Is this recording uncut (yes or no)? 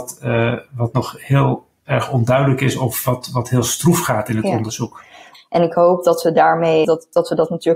no